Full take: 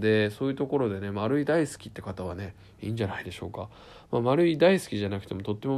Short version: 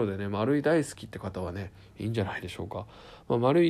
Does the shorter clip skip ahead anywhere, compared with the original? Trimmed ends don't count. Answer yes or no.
no